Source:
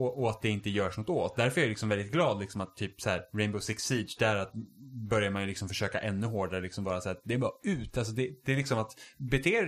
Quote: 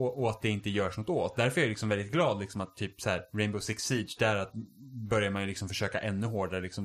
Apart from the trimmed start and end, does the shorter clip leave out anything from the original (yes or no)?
no